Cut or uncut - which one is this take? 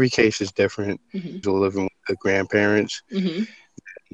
cut